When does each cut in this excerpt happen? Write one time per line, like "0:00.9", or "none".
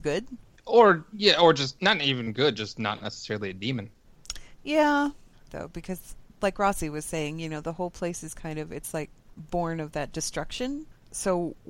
0:05.5